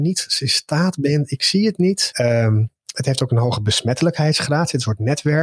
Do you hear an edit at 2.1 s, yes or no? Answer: yes